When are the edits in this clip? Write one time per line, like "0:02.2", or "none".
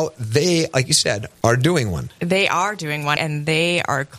0:01.3
0:03.2